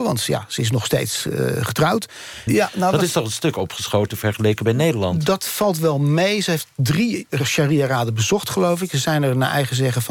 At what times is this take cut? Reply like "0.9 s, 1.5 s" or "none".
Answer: 2.5 s